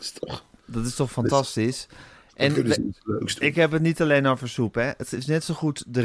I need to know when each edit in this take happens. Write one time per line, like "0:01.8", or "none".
none